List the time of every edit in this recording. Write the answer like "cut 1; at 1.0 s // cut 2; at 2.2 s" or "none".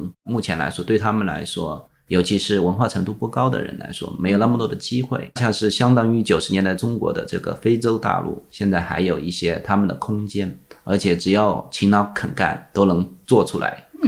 cut 1; at 5.4 s